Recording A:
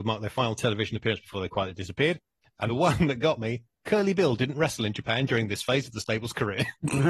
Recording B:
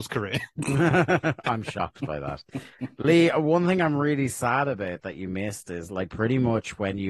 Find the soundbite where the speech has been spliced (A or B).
A